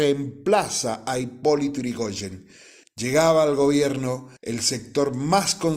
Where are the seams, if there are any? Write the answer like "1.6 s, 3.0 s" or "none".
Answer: 4.4 s